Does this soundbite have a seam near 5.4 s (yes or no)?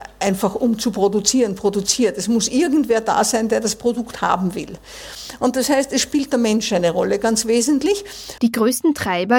no